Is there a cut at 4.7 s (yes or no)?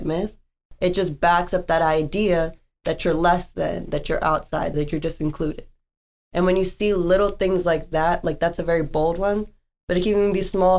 yes